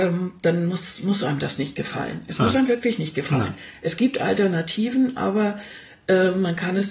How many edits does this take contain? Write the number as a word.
zero